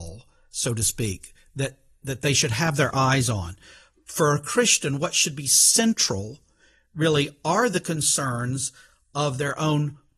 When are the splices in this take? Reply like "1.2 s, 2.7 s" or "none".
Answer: none